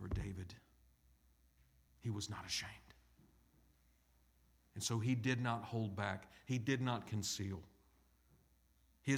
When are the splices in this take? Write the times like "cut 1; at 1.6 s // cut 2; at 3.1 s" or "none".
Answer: none